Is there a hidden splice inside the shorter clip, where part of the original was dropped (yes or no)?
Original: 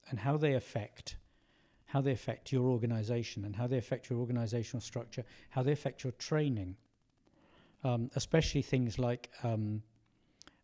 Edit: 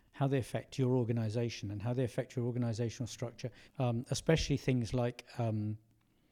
yes